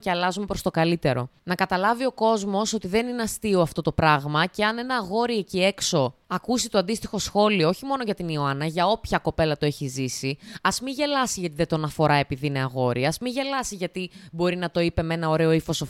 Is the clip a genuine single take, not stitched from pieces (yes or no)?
yes